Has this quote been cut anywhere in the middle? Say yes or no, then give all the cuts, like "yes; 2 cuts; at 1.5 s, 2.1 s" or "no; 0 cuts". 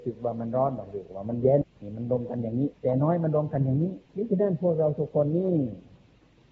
yes; 3 cuts; at 1.6 s, 2.7 s, 4.1 s